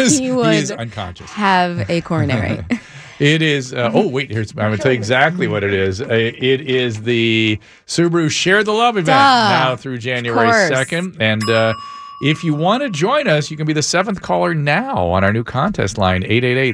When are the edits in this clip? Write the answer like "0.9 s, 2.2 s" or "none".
none